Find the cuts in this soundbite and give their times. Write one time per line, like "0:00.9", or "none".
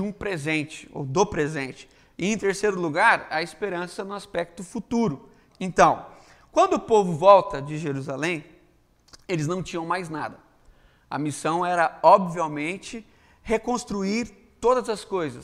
0:05.5